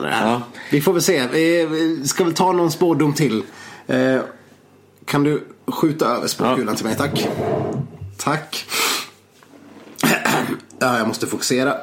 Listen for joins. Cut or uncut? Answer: uncut